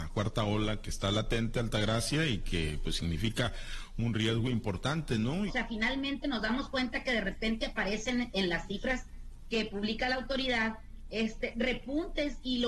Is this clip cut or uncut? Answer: cut